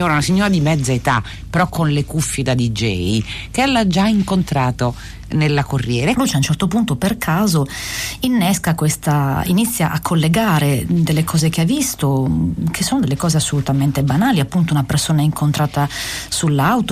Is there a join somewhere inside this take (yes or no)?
yes